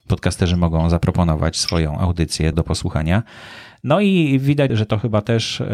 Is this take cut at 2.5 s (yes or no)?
yes